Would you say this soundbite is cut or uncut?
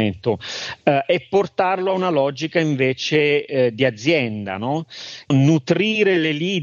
cut